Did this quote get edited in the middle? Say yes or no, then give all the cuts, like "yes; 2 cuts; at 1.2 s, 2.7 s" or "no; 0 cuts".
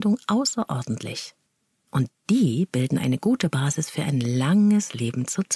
yes; 1 cut; at 1.9 s